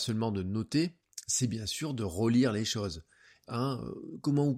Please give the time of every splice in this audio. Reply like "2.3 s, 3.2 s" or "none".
3.4 s